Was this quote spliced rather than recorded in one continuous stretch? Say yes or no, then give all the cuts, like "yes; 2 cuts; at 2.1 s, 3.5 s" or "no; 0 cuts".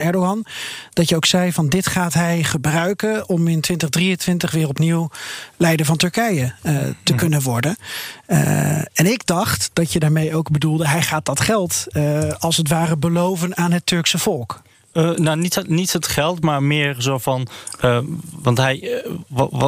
no; 0 cuts